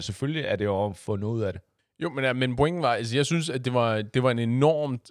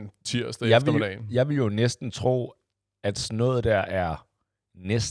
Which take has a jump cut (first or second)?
first